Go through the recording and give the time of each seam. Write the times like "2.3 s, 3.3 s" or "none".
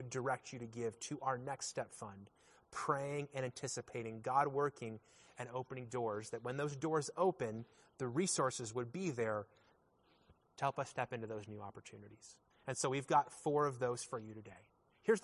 12.5 s